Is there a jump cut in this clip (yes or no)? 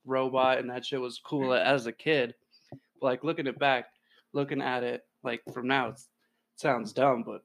no